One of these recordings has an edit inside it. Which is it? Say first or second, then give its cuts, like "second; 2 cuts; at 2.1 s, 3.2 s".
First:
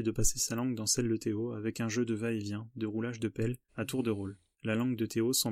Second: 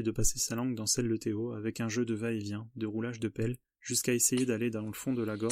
first; 1 cut; at 3.7 s